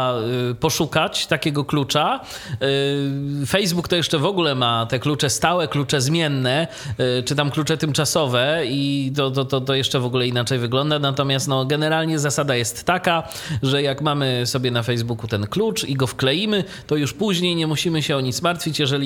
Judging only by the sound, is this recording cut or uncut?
uncut